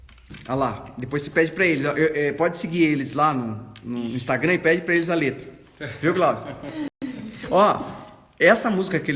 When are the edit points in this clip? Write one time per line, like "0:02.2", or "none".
none